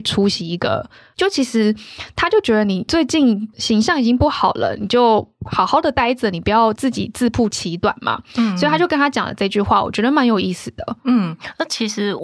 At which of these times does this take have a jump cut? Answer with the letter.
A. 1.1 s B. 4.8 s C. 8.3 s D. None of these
A